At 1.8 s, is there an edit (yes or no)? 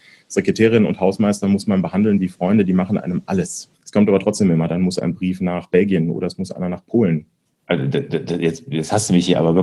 no